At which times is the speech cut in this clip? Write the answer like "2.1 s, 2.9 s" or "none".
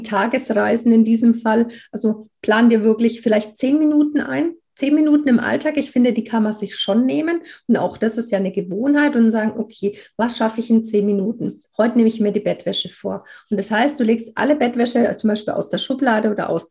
none